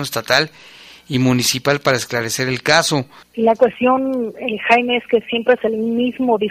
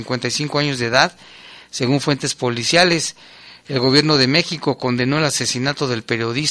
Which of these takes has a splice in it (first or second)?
first